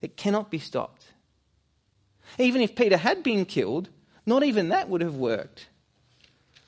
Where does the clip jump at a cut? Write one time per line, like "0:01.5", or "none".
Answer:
none